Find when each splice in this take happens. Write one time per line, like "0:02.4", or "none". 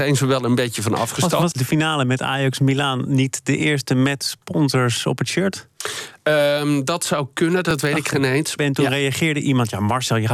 0:01.5
0:08.6